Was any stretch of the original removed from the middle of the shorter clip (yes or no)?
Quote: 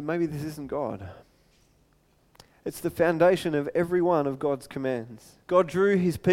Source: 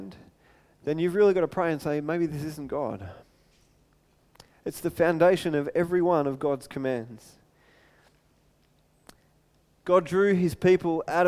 yes